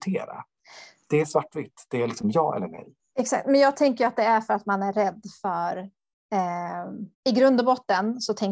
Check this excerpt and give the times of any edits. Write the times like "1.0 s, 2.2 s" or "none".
7.1 s